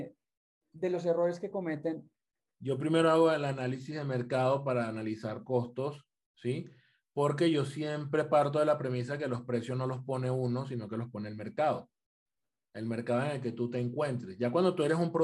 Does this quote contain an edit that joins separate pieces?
yes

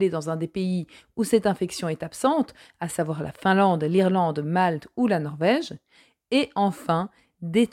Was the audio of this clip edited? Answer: no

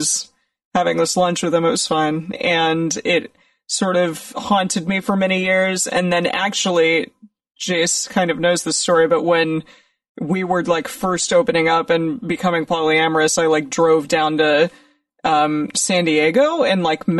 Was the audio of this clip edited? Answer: yes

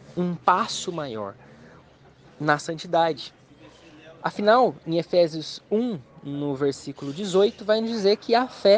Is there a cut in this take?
no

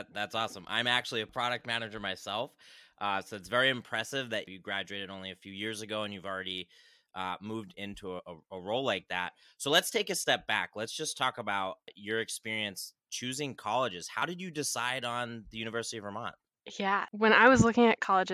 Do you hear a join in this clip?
no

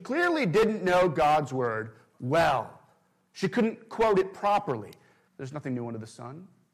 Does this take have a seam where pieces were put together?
yes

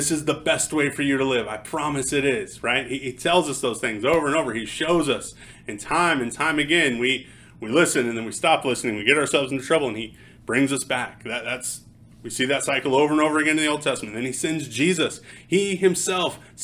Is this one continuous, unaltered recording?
yes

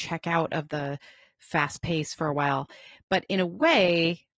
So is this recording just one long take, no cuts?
yes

